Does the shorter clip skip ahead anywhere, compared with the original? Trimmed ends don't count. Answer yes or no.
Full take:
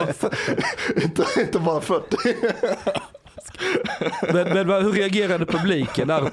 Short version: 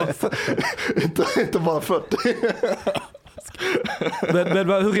no